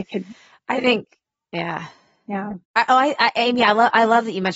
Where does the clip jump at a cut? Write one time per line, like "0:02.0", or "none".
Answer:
0:02.6